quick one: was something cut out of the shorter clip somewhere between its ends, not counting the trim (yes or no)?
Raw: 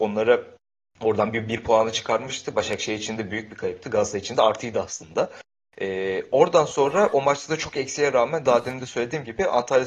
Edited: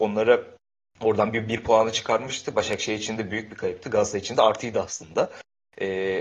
no